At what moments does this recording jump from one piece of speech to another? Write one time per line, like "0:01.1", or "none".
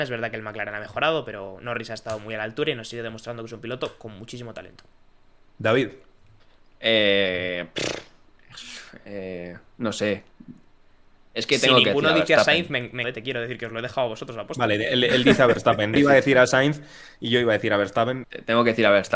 0:13.0
0:16.0
0:18.2

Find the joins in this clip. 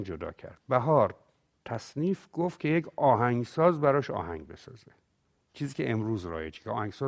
none

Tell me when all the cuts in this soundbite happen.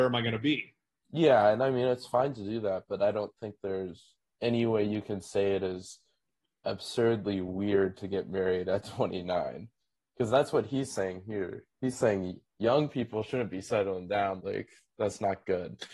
0:14.4

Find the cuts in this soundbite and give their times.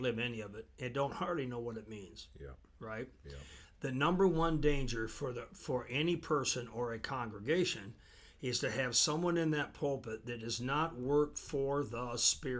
0:03.6

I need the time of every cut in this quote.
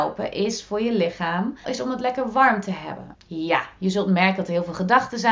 0:01.6
0:03.1

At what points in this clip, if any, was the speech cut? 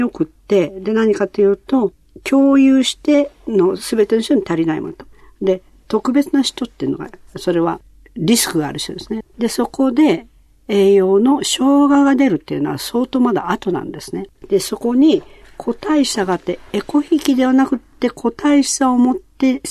0:09.2
0:14.4

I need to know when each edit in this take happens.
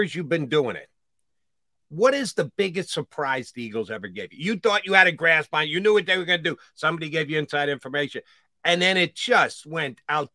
none

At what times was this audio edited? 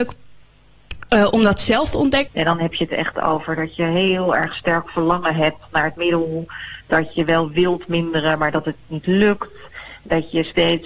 0:02.3

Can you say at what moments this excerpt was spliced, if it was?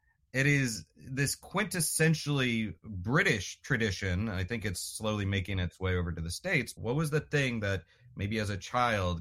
0:06.8

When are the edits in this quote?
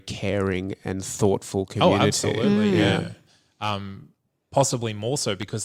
none

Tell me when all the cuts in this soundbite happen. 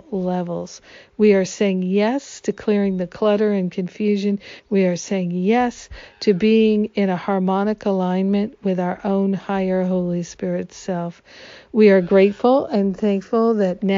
none

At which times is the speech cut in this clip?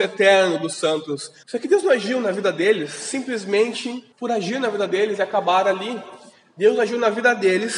0:01.4
0:04.1

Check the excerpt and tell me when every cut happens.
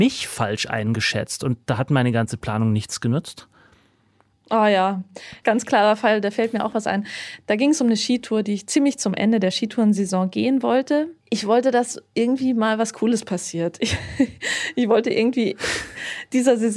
0:11.2

